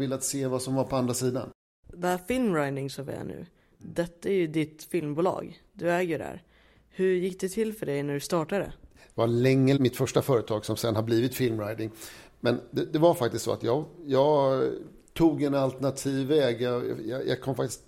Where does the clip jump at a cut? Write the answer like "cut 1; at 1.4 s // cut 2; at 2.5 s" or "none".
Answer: cut 1; at 9.8 s